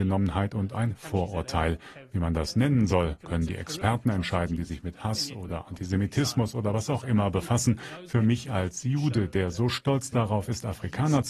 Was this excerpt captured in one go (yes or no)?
yes